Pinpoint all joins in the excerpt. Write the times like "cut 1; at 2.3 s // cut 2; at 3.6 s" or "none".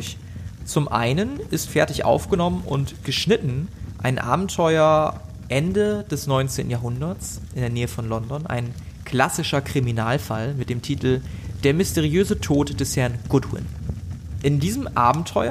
cut 1; at 1.7 s